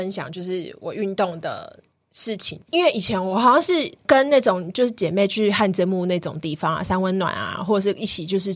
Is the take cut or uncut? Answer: cut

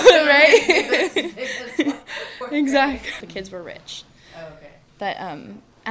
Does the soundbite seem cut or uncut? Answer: cut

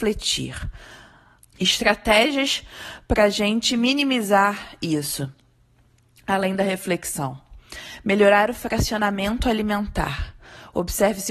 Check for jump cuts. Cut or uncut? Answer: cut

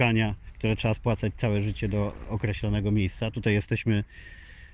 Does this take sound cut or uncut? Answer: uncut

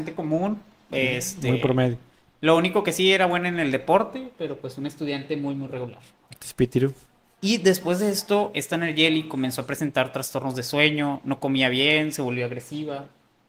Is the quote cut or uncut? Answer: cut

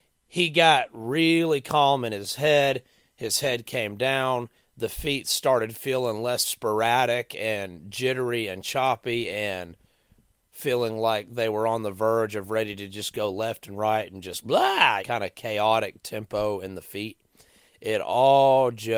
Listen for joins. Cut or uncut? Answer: cut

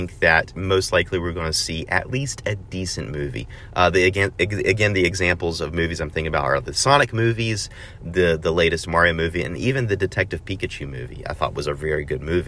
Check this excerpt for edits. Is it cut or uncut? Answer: uncut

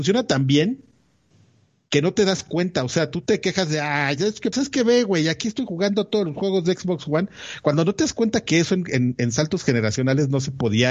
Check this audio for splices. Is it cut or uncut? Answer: cut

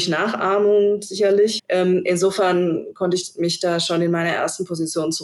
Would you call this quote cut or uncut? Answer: cut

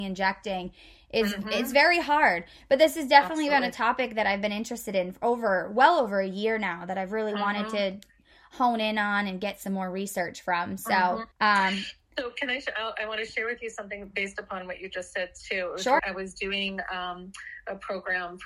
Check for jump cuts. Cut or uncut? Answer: cut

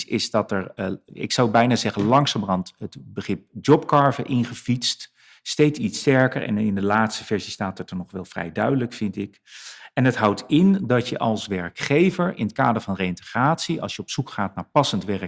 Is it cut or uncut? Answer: uncut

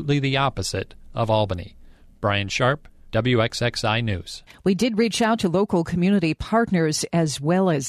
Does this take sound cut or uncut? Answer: uncut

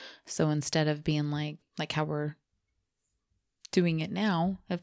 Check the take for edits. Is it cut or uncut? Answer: cut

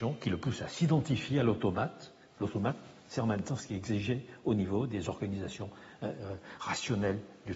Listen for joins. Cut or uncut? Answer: uncut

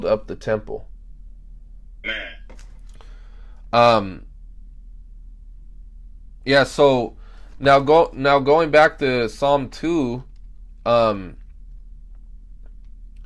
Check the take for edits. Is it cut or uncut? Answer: cut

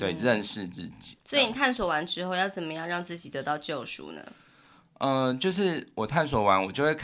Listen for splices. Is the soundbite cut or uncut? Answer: uncut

